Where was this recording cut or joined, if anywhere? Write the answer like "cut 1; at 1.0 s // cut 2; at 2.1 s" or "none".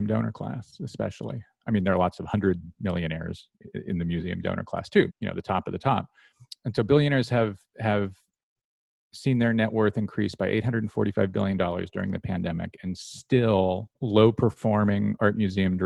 cut 1; at 5.1 s // cut 2; at 13.9 s